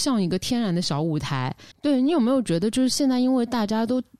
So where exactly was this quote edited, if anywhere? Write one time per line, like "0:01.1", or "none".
0:01.7

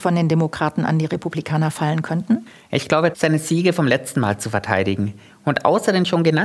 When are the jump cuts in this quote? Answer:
0:03.1
0:05.3

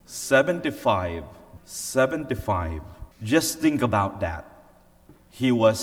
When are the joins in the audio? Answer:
0:01.6
0:03.1

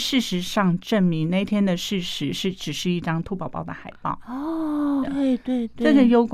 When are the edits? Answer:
0:05.0

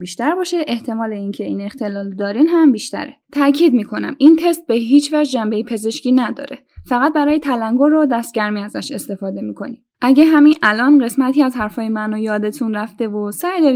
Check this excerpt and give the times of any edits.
0:03.2
0:09.9

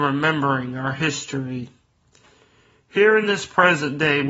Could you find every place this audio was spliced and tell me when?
none

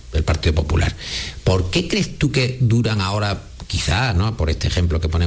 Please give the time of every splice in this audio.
none

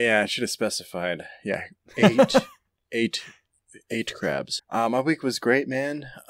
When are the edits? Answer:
0:04.6

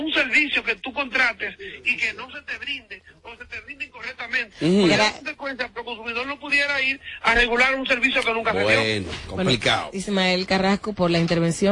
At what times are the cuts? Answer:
0:04.5
0:09.9

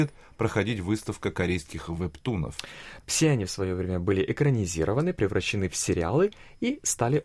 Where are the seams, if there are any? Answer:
0:03.0

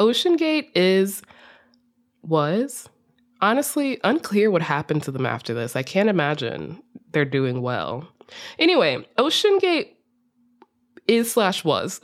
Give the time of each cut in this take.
none

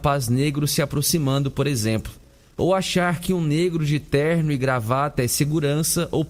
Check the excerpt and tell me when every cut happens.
none

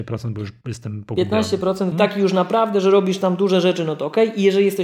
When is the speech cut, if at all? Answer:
0:01.9

